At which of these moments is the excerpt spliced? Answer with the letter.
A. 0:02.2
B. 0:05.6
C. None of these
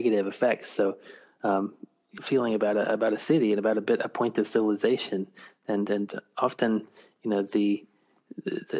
A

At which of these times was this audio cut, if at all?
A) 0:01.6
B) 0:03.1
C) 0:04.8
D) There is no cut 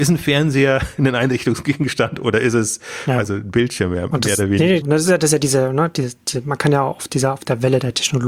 C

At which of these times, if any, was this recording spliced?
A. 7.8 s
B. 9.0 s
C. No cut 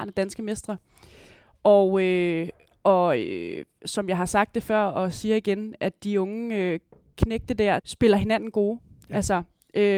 A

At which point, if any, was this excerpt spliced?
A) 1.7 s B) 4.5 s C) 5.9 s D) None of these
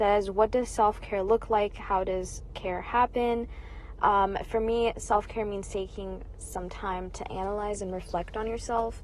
D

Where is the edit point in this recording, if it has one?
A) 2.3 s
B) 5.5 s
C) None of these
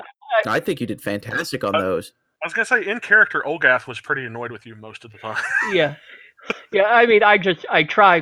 C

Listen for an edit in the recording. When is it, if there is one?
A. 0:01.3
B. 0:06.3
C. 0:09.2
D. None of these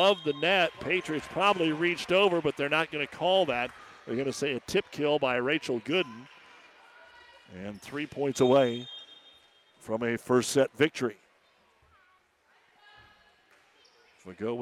D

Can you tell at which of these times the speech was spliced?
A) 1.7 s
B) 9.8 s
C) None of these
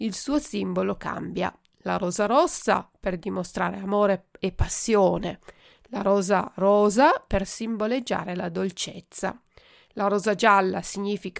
C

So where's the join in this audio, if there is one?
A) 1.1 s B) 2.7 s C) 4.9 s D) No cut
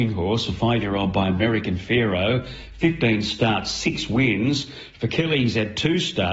D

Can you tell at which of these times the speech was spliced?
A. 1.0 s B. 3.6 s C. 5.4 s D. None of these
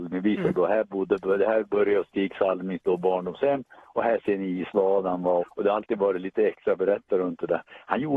C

